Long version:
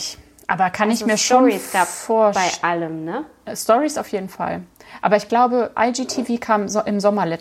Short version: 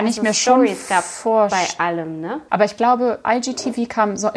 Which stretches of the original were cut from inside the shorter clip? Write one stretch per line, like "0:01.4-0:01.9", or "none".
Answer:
0:03.3-0:05.0